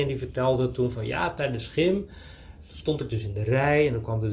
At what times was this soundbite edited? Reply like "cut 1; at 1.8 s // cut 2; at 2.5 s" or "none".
none